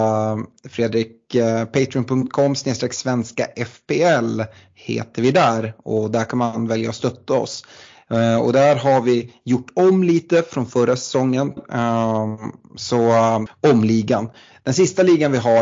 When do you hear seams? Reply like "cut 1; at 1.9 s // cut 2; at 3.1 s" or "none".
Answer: cut 1; at 11.6 s // cut 2; at 13.5 s

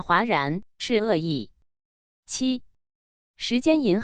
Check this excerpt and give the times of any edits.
none

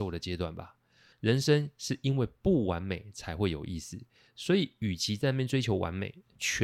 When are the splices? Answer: cut 1; at 1.1 s

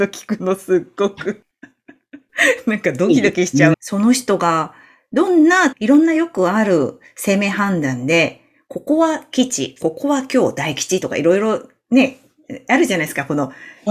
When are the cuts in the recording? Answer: cut 1; at 3.7 s // cut 2; at 5.7 s

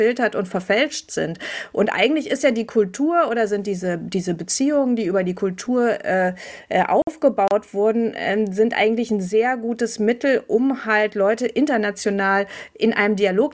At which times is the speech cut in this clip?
none

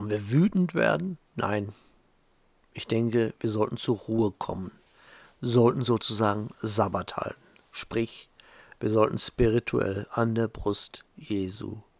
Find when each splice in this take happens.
cut 1; at 1.2 s

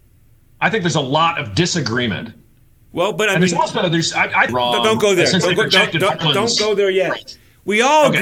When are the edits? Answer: cut 1; at 4.5 s

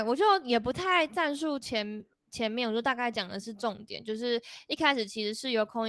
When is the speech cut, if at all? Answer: none

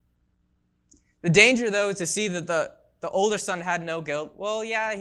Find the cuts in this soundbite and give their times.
none

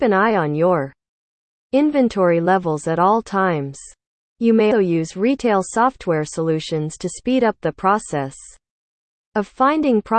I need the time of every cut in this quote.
cut 1; at 4.7 s

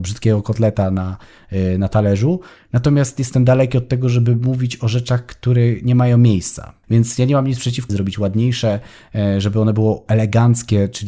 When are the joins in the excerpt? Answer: cut 1; at 6.8 s // cut 2; at 7.9 s

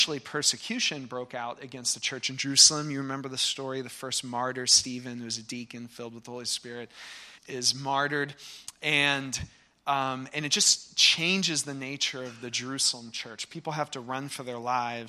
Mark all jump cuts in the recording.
cut 1; at 7.4 s

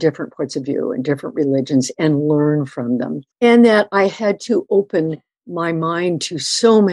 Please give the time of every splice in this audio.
cut 1; at 3.3 s

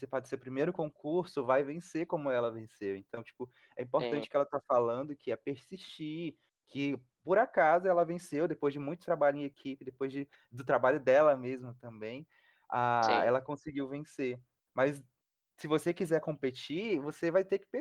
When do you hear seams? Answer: none

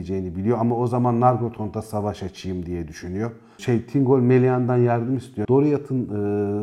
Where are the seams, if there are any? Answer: cut 1; at 3.6 s // cut 2; at 5.4 s

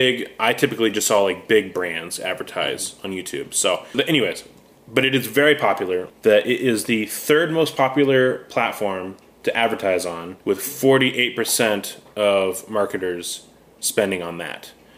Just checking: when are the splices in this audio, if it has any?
cut 1; at 3.9 s // cut 2; at 6.1 s // cut 3; at 10.4 s

